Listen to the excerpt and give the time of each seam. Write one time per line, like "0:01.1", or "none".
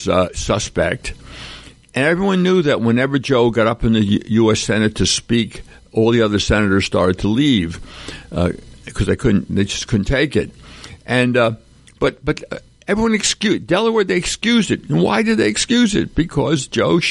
none